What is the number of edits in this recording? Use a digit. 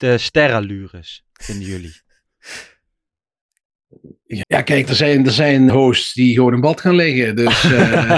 2